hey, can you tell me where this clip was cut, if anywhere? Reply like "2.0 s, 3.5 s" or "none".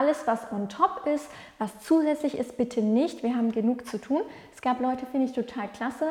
none